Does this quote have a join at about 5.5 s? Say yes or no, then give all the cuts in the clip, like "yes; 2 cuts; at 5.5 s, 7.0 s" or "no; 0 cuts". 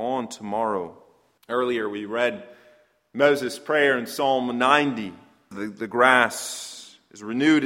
yes; 2 cuts; at 1.4 s, 5.5 s